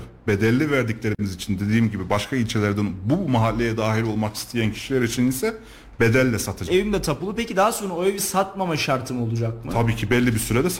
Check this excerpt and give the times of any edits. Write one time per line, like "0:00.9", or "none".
0:06.7